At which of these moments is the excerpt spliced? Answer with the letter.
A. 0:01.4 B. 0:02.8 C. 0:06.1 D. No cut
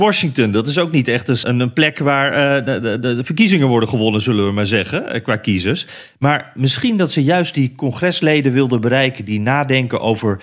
A